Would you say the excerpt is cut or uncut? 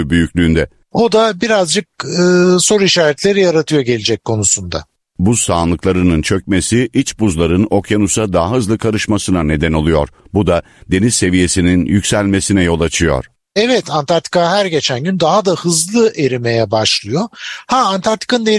cut